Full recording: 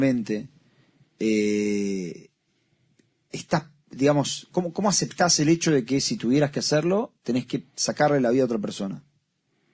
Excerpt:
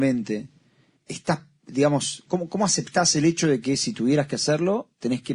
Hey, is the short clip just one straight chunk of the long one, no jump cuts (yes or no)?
no